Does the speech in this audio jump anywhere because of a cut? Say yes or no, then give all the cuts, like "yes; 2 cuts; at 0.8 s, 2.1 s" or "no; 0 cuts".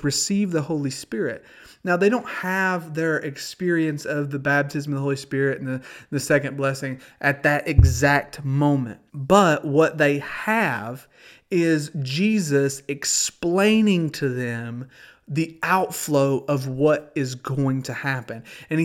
yes; 1 cut; at 9.1 s